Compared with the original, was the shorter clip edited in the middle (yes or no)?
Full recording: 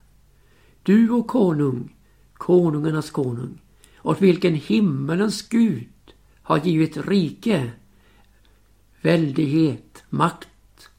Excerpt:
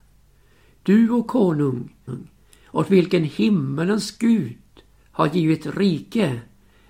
yes